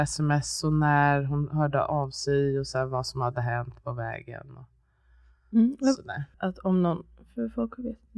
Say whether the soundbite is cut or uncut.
cut